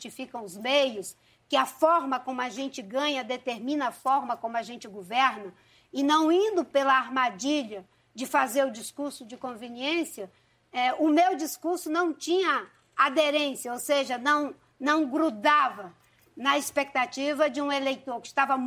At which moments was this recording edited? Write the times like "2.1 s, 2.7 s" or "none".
none

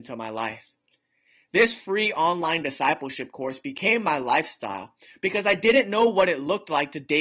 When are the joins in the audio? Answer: none

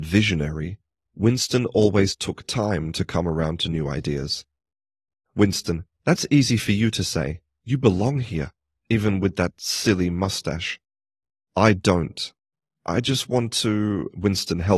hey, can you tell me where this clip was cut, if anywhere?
5.3 s

